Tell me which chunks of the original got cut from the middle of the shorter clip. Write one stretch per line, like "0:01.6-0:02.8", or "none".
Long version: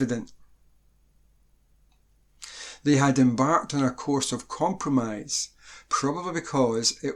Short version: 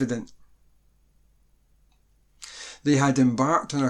none